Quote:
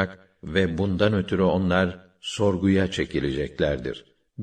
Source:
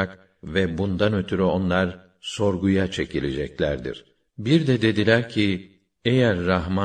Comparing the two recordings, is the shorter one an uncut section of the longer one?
yes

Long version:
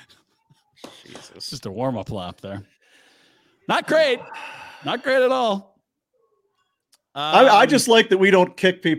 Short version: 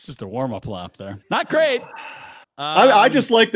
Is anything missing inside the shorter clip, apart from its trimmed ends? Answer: yes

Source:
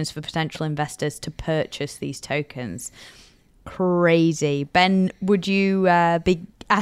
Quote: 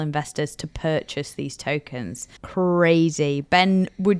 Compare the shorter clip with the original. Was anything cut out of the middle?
yes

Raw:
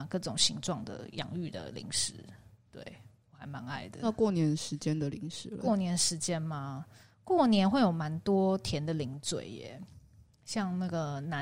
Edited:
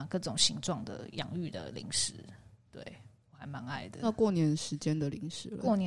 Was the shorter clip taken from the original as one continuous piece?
yes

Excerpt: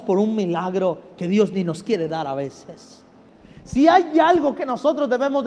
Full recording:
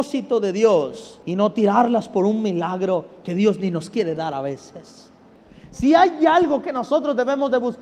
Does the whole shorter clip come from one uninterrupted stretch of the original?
yes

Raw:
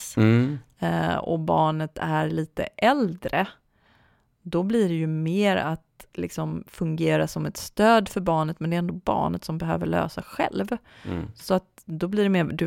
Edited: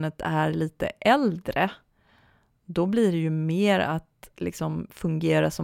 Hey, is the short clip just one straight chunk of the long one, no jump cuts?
yes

